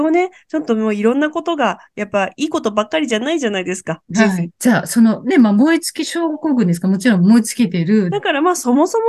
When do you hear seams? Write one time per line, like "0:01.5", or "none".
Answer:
0:04.5
0:08.1